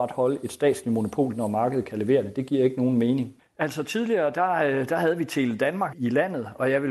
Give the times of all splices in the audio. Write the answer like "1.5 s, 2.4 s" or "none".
3.4 s, 5.9 s